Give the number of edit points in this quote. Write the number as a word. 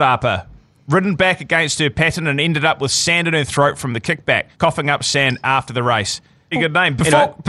two